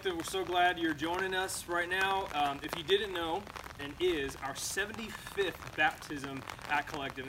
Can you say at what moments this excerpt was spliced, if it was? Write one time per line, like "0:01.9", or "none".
0:02.3
0:03.8